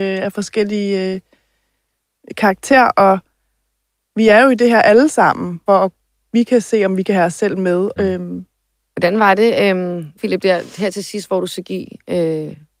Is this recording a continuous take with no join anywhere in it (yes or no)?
no